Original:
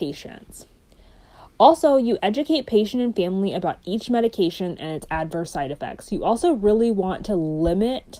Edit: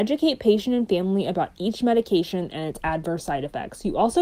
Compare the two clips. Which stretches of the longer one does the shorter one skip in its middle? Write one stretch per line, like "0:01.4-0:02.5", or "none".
none